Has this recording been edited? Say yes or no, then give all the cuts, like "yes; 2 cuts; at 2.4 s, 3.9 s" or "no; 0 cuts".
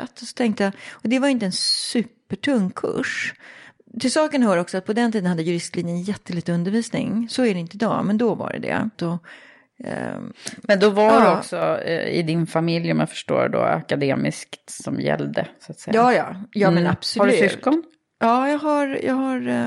yes; 1 cut; at 8.9 s